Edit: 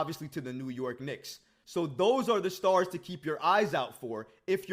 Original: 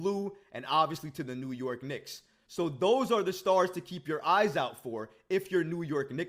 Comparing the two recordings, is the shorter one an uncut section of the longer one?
yes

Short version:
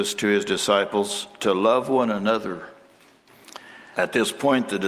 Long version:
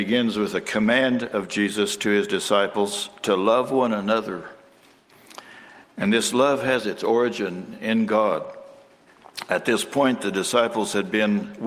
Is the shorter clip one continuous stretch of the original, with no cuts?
no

